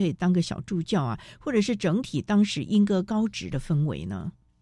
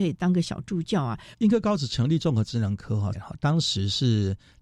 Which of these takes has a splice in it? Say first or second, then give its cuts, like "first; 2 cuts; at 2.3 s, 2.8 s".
second; 2 cuts; at 1.3 s, 3.1 s